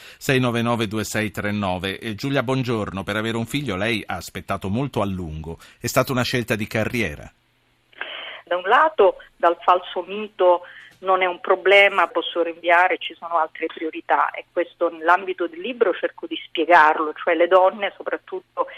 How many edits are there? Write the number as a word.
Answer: two